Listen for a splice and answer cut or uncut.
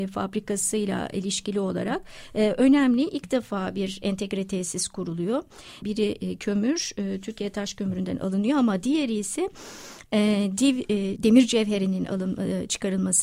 cut